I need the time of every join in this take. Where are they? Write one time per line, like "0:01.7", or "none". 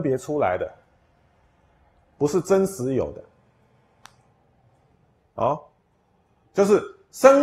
0:06.5